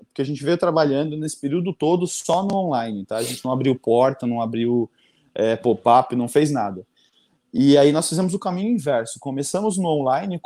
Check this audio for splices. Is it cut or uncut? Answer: uncut